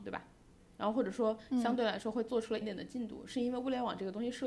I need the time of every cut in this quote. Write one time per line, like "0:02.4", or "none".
0:02.6